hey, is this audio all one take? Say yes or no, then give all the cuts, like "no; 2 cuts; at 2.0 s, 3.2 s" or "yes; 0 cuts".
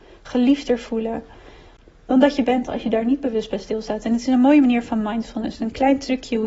yes; 0 cuts